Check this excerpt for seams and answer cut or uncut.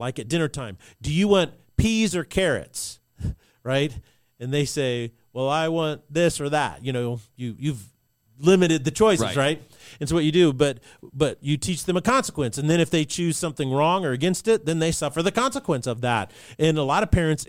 uncut